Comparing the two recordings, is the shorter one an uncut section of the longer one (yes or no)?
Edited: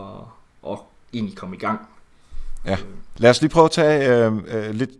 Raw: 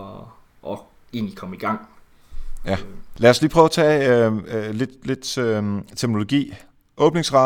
yes